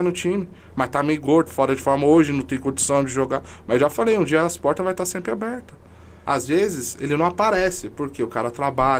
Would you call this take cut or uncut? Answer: cut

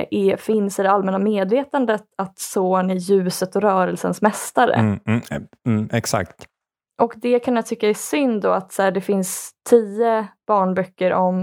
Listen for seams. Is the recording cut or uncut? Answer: uncut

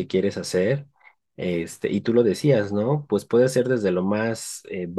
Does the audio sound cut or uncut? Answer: uncut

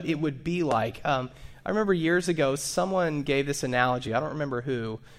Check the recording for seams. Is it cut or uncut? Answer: uncut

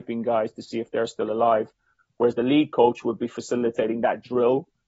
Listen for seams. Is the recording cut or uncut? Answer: uncut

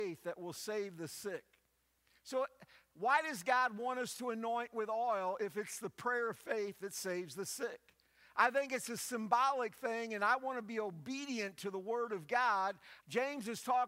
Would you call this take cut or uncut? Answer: cut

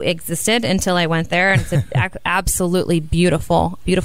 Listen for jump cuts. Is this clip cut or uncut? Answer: uncut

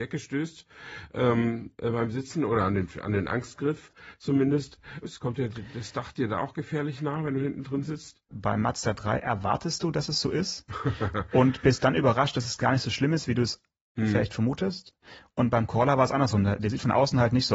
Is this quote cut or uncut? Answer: cut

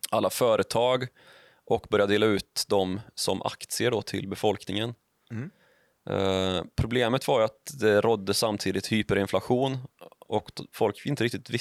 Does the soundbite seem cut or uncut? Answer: uncut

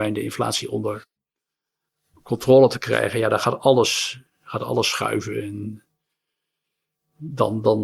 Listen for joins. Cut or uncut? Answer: cut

